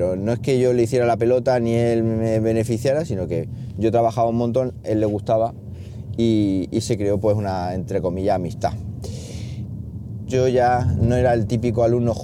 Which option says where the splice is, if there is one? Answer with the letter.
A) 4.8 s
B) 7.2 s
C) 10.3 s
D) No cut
C